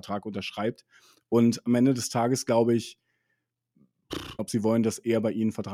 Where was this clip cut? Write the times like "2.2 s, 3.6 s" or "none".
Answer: 4.4 s